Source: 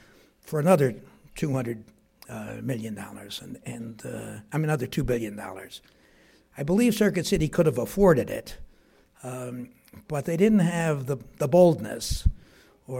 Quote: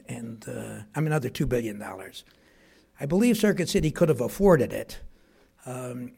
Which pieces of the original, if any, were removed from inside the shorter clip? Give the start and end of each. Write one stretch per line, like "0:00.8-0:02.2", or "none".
none

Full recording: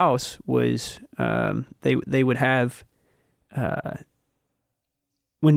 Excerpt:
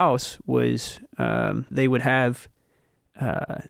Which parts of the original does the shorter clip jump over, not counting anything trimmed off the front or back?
0:01.7-0:02.0

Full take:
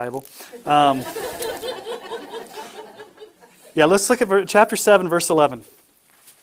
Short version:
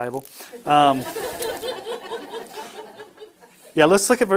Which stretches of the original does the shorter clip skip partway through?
none

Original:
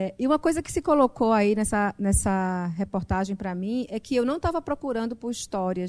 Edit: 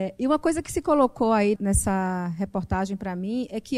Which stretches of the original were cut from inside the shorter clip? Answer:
0:01.6-0:01.9

